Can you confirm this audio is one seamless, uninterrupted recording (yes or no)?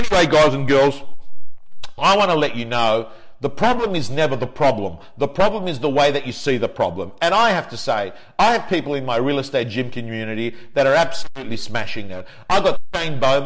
yes